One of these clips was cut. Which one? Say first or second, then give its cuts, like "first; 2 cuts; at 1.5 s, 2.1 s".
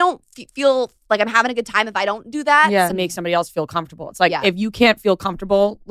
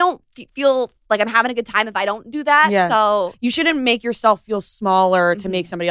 first; 1 cut; at 2.9 s